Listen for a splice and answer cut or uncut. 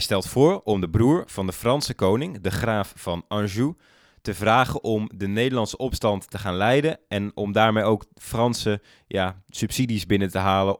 uncut